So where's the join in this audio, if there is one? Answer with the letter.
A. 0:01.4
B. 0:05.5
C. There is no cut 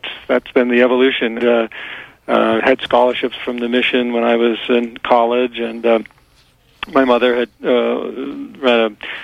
A